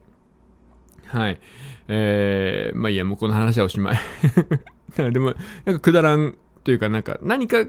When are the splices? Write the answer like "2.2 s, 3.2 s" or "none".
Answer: none